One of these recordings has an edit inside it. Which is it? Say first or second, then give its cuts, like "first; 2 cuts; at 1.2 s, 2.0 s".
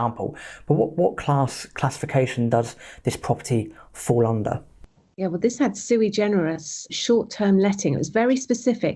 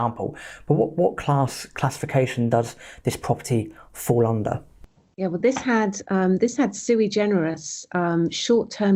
first; 2 cuts; at 5.4 s, 6.9 s